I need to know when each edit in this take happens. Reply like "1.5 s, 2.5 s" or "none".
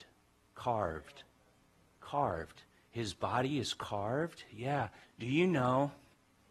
5.0 s